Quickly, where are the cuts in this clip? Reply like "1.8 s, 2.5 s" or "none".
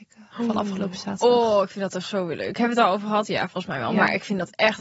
none